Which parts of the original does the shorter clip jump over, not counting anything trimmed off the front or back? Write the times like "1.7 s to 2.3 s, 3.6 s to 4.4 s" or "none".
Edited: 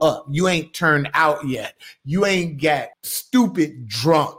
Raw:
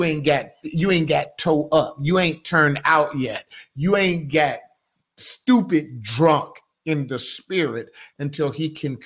4.6 s to 5.1 s